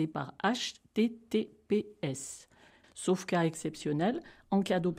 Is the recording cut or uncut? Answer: cut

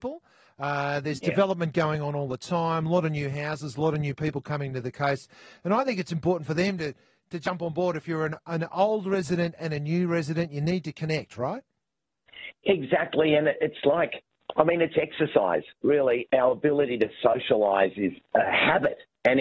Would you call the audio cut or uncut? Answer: uncut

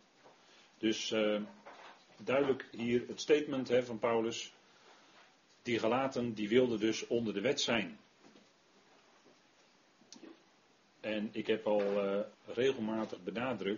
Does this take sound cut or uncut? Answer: cut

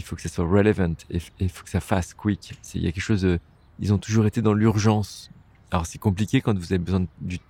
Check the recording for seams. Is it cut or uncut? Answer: uncut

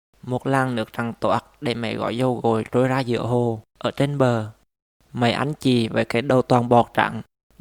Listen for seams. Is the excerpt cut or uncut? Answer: cut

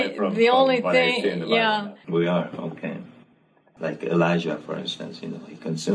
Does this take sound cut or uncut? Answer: cut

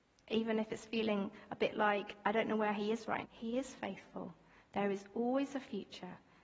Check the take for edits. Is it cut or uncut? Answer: cut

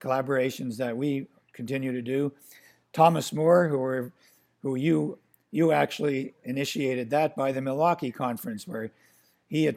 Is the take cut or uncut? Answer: uncut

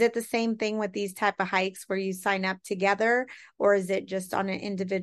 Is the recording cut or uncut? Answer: uncut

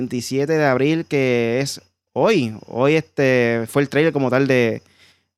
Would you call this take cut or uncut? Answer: uncut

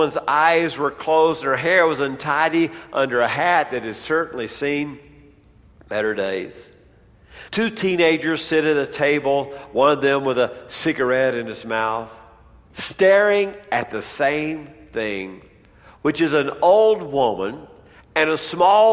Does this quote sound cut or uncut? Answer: cut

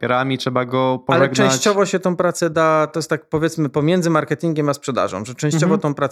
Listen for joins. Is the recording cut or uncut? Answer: uncut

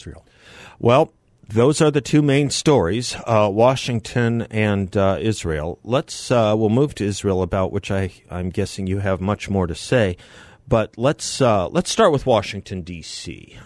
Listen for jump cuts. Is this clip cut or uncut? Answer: uncut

